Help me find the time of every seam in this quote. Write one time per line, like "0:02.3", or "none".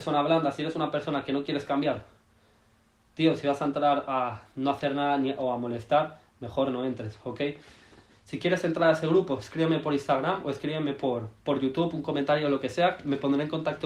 0:08.1
0:11.3